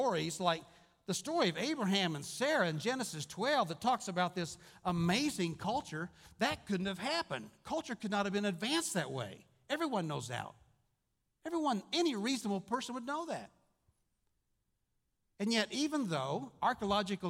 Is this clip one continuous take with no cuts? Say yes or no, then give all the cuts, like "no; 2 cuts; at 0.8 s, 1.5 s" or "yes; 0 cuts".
yes; 0 cuts